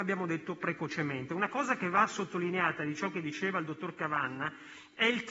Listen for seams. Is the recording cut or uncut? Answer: uncut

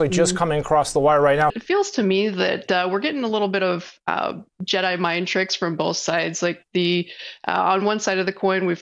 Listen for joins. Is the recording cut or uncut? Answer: cut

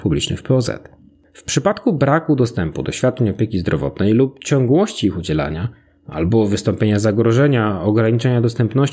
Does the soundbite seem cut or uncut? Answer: cut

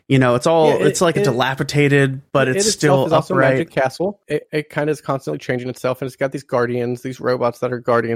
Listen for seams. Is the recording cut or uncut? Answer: uncut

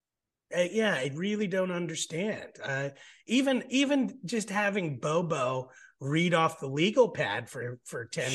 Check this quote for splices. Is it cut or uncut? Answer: uncut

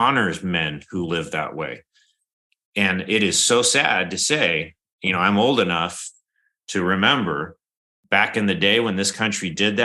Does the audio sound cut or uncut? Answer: uncut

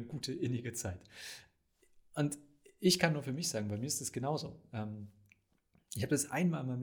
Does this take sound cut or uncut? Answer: uncut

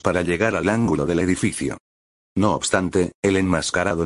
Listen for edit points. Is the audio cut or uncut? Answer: cut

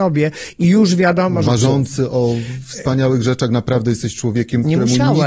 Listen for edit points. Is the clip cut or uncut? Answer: cut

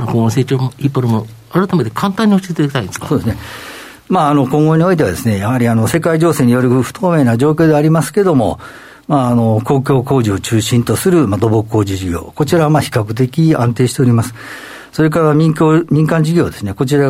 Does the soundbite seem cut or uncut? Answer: uncut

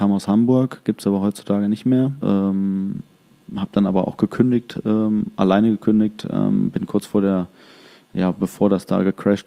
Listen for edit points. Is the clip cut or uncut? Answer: cut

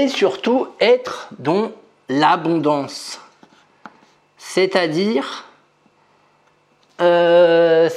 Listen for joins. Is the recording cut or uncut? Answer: uncut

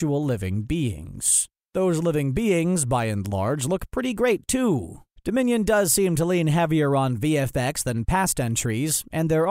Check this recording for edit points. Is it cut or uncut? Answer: uncut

